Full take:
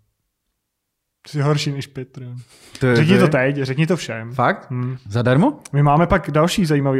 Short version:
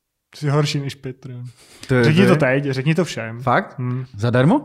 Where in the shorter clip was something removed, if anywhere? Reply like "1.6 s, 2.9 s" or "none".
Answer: none